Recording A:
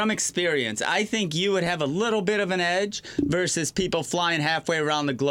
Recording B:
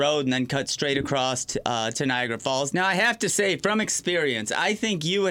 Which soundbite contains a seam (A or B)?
B